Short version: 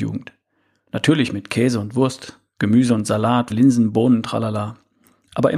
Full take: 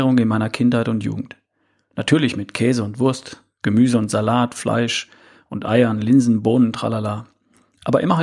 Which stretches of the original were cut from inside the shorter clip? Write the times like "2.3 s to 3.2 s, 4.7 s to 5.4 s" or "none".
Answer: 4.5 s to 6.0 s